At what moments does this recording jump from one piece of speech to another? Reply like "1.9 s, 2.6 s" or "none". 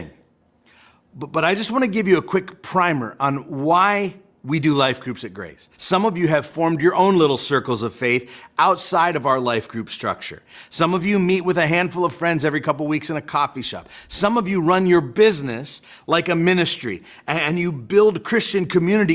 5.7 s